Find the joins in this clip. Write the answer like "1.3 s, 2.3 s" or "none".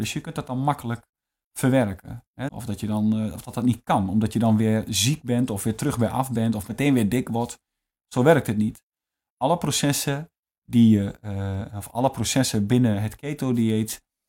2.5 s